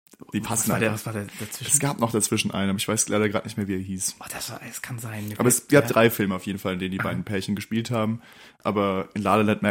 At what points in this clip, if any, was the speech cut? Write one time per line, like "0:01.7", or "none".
none